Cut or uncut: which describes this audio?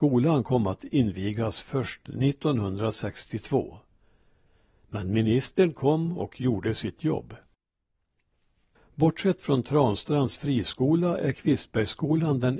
cut